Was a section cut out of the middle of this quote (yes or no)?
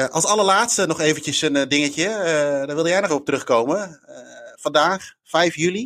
yes